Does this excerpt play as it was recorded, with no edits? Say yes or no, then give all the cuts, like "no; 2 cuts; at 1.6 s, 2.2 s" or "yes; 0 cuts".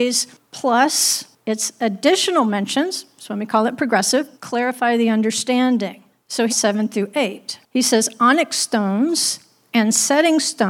no; 2 cuts; at 4.3 s, 6.5 s